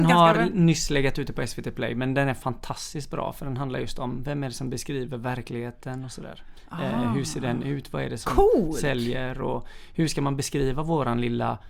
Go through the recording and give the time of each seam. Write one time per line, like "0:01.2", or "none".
none